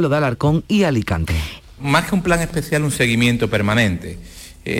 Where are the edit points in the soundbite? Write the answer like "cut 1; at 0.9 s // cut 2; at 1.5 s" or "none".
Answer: cut 1; at 1.6 s

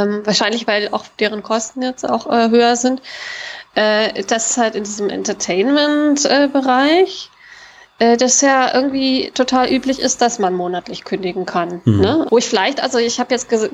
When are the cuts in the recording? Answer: cut 1; at 3.7 s // cut 2; at 12.3 s

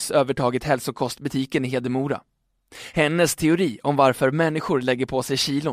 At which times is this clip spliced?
none

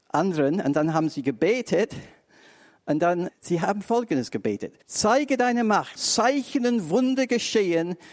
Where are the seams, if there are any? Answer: cut 1; at 3.3 s // cut 2; at 4.8 s // cut 3; at 6.0 s

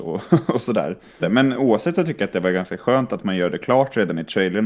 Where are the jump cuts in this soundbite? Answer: cut 1; at 1.2 s

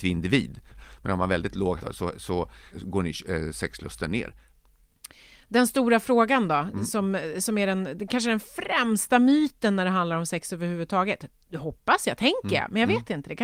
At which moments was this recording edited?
cut 1; at 1.8 s

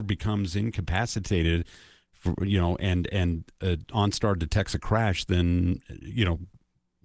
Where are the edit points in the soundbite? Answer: none

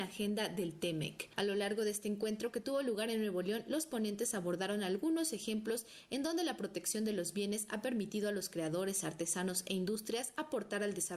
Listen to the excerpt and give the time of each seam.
none

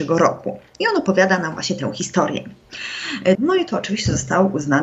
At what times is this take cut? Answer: cut 1; at 3.4 s

